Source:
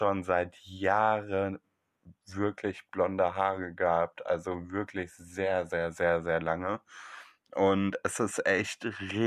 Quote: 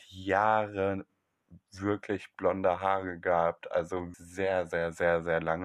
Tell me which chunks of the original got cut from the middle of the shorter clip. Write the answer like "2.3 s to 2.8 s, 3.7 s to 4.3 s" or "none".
4.7 s to 5.1 s